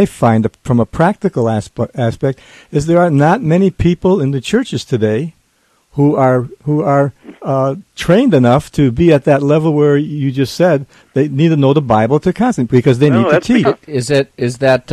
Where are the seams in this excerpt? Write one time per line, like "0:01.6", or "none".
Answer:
0:13.7